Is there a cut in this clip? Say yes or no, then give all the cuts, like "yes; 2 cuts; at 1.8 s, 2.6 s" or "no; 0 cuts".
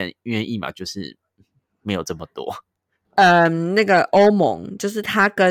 yes; 1 cut; at 3.0 s